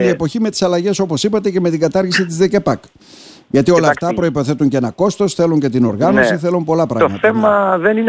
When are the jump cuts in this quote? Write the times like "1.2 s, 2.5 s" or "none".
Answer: none